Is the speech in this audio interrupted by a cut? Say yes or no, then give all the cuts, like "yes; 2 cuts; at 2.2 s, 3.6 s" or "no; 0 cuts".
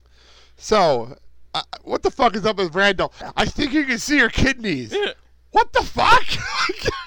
no; 0 cuts